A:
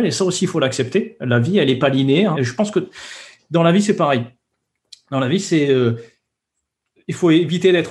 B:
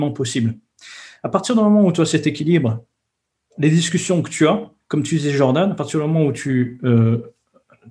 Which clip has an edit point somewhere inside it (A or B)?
A